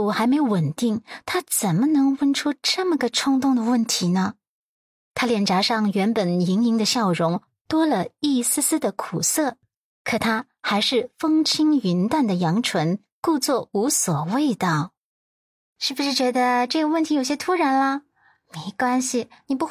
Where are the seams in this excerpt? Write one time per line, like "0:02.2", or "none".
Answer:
none